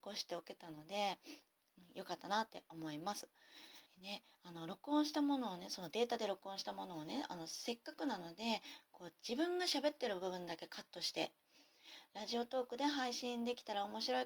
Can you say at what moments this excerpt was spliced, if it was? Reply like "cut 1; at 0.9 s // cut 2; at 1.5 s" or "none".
cut 1; at 3.9 s